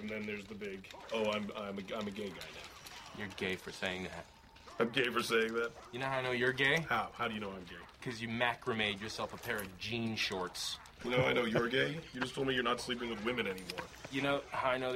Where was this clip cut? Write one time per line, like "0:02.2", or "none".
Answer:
none

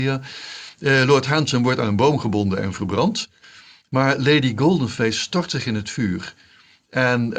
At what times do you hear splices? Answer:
none

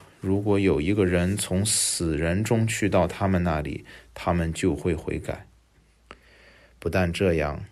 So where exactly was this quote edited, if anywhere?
0:05.7

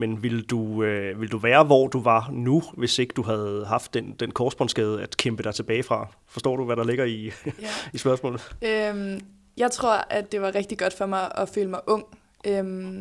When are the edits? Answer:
none

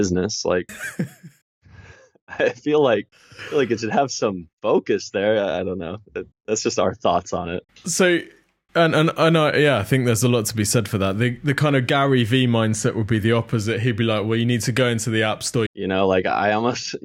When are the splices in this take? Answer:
0:15.7

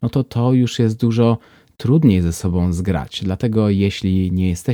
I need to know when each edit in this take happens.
none

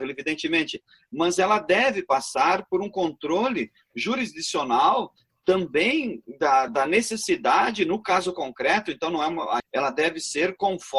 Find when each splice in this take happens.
0:06.7
0:09.6

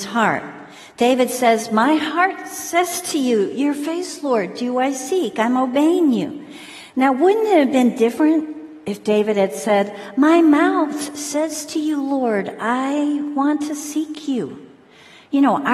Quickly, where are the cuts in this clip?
none

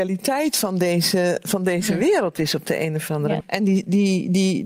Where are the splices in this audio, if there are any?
0:03.4

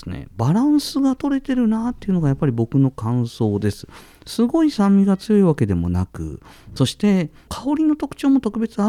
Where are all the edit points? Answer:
0:07.5

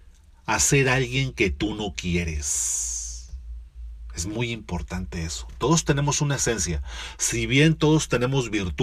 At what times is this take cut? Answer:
none

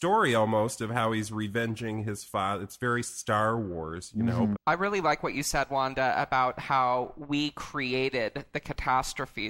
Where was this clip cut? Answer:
0:04.6

